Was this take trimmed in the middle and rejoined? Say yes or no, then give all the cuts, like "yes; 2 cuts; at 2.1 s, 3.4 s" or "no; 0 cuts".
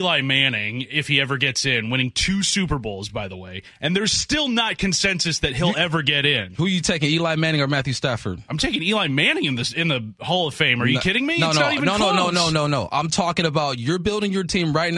no; 0 cuts